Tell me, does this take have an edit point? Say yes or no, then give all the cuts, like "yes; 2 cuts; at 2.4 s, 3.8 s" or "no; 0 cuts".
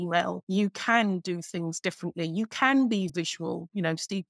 yes; 1 cut; at 3.1 s